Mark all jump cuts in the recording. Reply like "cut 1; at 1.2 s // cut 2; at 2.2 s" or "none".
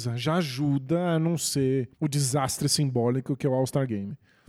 cut 1; at 1.9 s